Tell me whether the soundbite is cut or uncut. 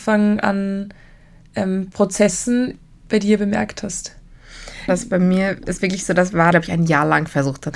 cut